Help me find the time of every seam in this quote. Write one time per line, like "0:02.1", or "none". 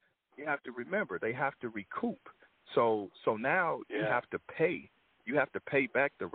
none